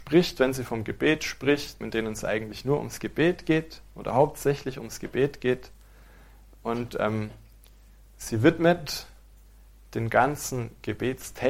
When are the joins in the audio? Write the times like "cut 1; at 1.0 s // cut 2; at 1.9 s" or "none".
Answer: cut 1; at 1.8 s

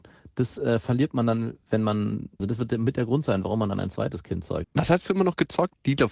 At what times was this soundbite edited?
cut 1; at 2.4 s // cut 2; at 4.6 s

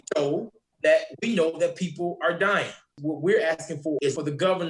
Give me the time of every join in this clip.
cut 1; at 2.9 s

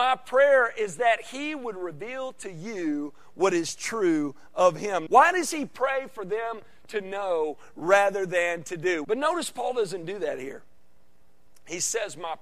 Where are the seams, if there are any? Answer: cut 1; at 5.1 s // cut 2; at 9.0 s

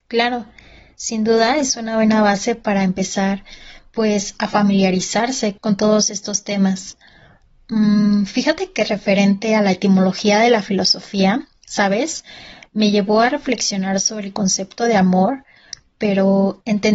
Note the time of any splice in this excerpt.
cut 1; at 5.6 s

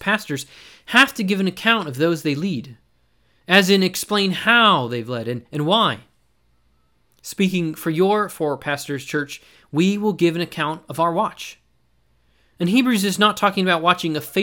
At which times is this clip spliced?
none

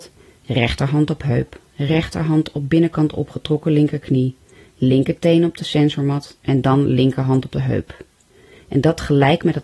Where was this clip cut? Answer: none

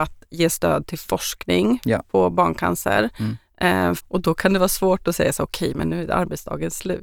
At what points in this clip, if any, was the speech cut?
cut 1; at 4.0 s

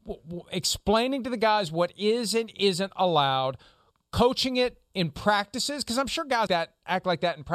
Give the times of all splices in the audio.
cut 1; at 6.5 s

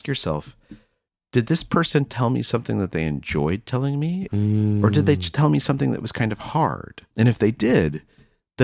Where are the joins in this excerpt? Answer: cut 1; at 4.3 s // cut 2; at 7.1 s

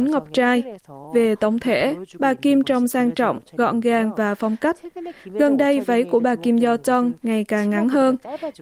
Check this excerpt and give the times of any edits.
none

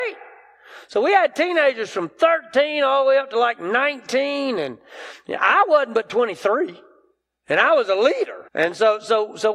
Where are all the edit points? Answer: cut 1; at 8.5 s

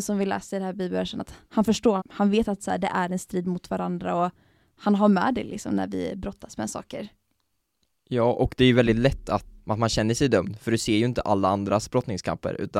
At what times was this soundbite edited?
cut 1; at 2.0 s // cut 2; at 9.6 s

